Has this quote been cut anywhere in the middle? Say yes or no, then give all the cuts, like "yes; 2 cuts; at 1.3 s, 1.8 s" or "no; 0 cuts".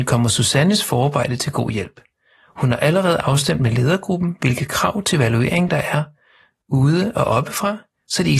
no; 0 cuts